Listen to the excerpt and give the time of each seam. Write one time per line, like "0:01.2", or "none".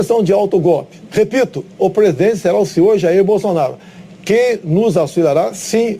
0:01.1